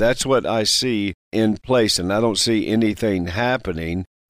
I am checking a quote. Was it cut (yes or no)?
no